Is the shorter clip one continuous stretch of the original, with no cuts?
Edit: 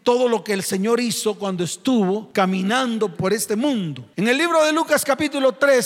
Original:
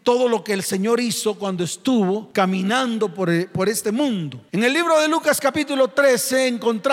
no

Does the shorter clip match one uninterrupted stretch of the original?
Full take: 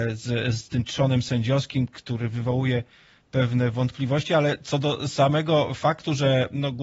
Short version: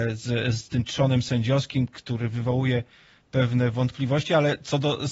yes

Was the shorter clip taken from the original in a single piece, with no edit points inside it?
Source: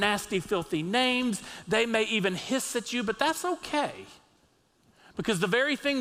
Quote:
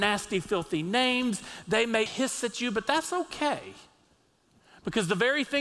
no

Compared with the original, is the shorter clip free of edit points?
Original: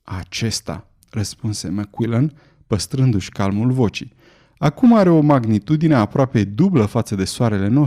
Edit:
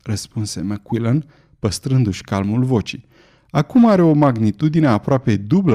yes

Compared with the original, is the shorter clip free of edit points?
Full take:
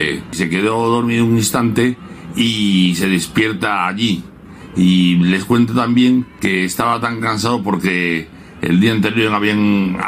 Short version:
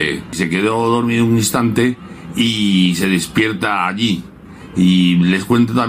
yes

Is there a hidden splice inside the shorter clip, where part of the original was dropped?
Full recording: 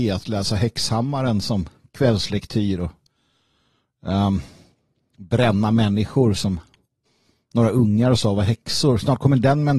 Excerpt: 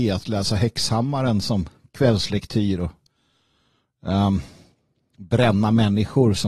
no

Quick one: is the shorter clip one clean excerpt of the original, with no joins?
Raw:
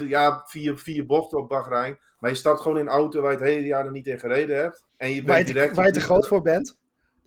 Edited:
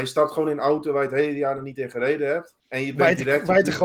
yes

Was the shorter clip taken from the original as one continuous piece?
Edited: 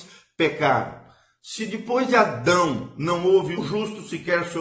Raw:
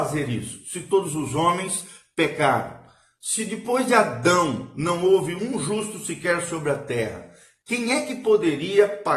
no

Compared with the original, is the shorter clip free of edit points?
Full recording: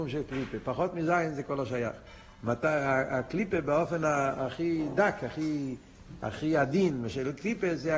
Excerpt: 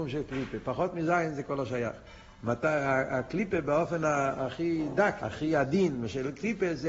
no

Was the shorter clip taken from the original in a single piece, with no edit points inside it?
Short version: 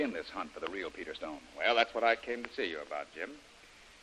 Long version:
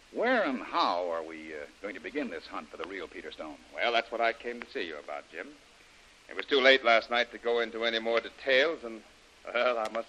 yes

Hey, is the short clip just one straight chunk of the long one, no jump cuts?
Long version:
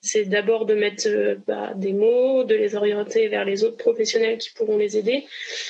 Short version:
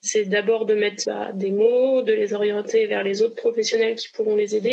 no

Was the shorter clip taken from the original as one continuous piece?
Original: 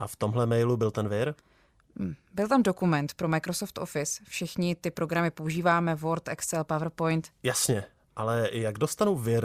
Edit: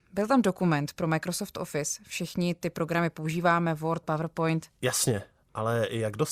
no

